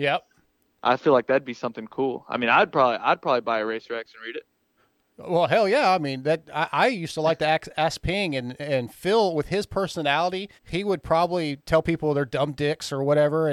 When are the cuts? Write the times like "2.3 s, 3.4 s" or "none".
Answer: 10.6 s